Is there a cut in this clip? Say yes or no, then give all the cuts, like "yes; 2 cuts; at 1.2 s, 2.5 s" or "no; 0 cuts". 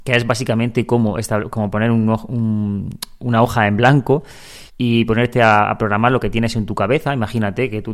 yes; 1 cut; at 4.7 s